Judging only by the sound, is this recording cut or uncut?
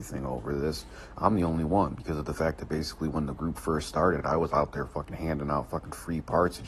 uncut